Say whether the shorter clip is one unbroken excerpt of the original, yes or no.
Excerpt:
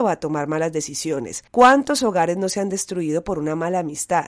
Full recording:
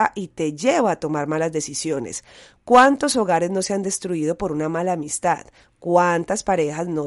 no